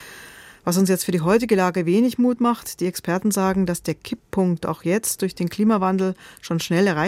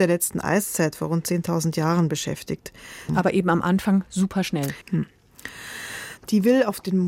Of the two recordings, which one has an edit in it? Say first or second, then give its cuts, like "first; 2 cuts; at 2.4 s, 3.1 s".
second; 3 cuts; at 3.1 s, 4.8 s, 6.2 s